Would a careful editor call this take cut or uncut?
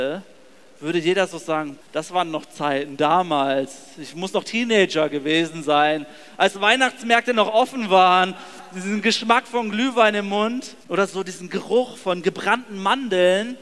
cut